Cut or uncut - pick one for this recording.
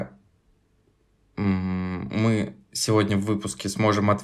uncut